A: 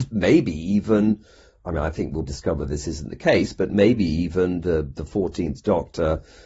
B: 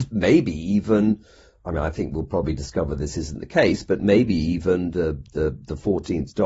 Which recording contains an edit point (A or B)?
A